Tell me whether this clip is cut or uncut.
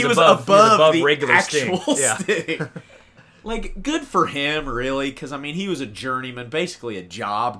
uncut